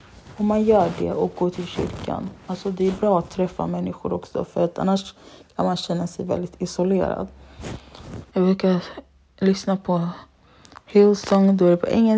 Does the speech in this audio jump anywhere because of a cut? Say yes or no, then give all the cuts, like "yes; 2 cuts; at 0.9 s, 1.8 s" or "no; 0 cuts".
yes; 1 cut; at 8.3 s